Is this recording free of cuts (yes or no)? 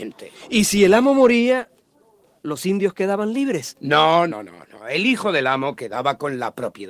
no